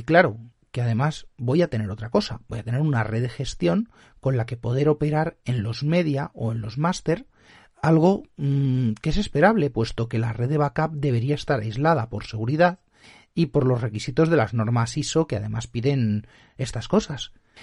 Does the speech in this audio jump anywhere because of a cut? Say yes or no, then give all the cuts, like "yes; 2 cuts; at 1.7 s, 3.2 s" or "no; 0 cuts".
no; 0 cuts